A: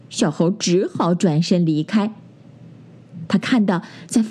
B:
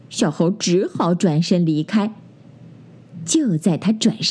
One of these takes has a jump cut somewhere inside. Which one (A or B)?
A